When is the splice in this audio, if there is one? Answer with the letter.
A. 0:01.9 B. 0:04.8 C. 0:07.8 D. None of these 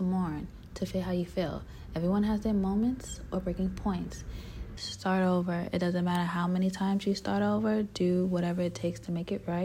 B